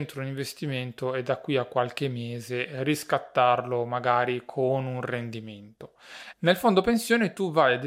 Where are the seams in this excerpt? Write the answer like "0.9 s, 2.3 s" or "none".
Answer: 6.3 s